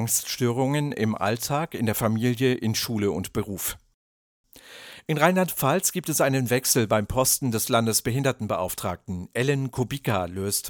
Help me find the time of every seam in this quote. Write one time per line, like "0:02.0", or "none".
none